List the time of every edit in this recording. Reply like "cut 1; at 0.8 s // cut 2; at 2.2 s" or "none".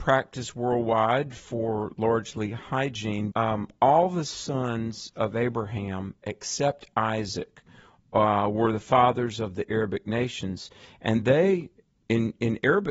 cut 1; at 3.3 s